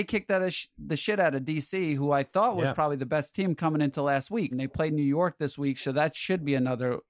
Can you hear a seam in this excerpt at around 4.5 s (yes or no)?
yes